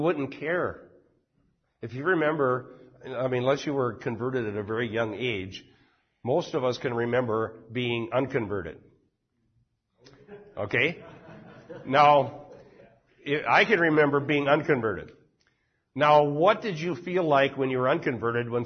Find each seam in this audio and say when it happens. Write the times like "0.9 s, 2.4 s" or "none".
none